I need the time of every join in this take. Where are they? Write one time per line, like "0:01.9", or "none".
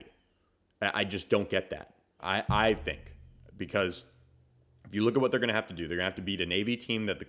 0:02.2